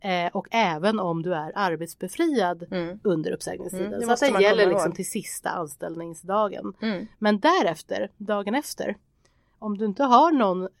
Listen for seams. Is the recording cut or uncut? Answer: uncut